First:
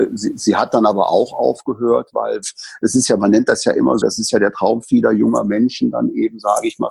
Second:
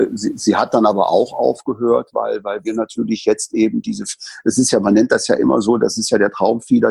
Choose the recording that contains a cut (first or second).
first